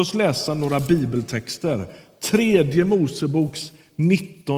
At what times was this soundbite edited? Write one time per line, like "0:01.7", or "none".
none